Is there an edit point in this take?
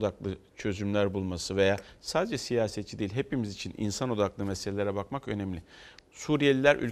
yes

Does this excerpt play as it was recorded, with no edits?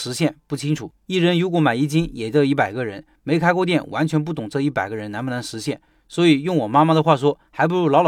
yes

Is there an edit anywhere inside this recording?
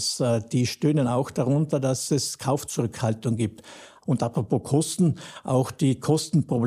yes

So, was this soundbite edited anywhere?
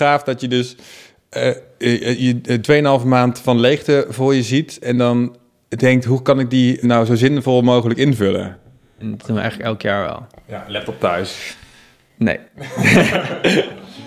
yes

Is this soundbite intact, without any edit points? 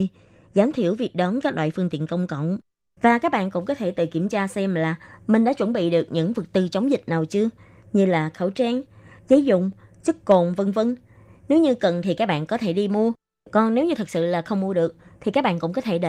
yes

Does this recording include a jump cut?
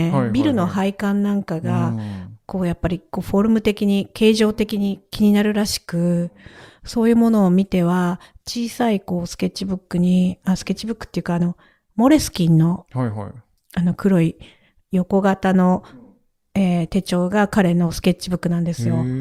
no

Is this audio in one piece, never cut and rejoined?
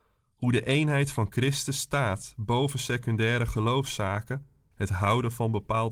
no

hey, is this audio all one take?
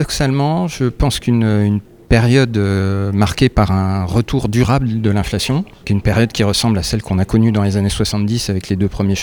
no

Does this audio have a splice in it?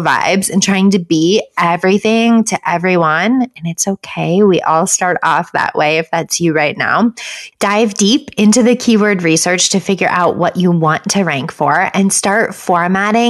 yes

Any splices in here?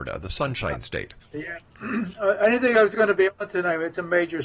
yes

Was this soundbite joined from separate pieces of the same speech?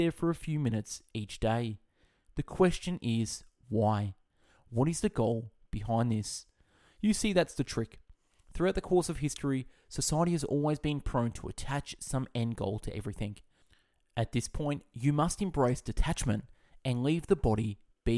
no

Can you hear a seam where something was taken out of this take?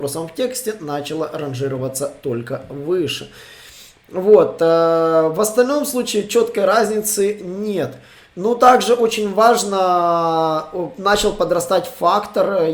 no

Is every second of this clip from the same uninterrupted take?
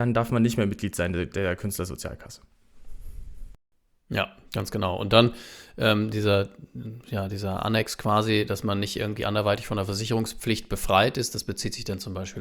yes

